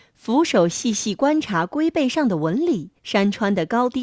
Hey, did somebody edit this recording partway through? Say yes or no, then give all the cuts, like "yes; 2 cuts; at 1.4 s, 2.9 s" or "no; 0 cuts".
yes; 1 cut; at 3.0 s